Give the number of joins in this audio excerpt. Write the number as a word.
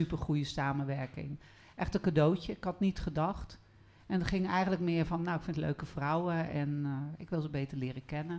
zero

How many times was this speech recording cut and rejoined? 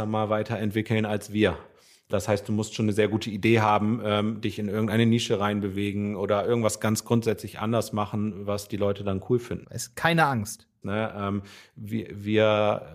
two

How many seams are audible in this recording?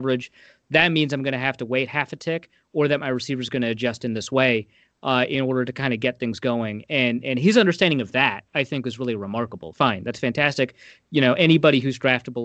one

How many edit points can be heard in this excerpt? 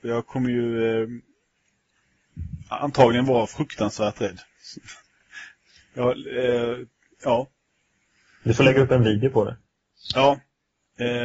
one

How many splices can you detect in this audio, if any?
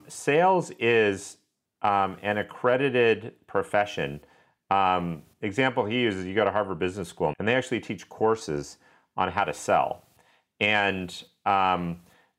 one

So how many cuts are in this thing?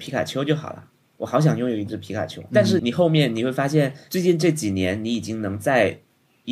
one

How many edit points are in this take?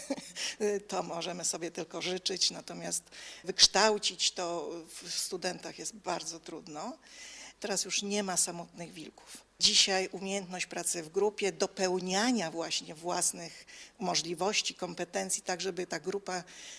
one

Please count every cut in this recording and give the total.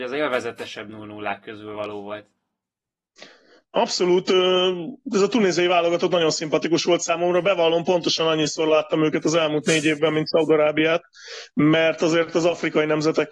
zero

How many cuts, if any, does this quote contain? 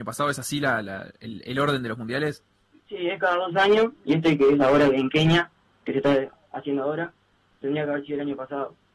zero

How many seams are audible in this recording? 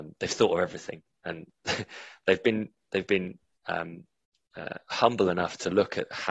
zero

